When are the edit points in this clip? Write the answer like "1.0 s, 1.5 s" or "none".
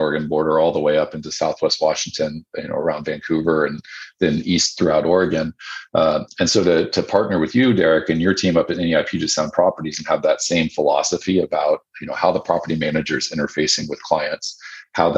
none